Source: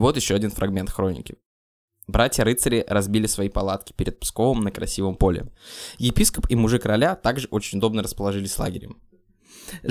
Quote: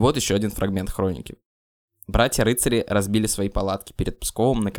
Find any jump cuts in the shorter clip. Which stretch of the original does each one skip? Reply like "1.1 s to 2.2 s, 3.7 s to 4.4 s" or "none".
none